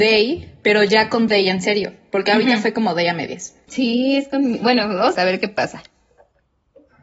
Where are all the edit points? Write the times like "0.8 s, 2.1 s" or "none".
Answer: 3.7 s, 5.1 s